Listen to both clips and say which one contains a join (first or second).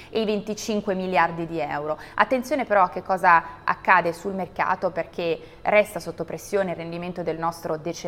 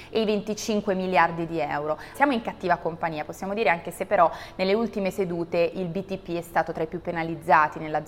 second